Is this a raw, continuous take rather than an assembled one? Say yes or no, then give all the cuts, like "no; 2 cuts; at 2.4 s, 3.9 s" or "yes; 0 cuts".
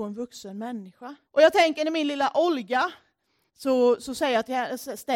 no; 2 cuts; at 1.3 s, 3.5 s